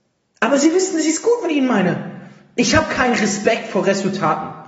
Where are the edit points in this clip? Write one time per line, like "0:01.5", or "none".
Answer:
none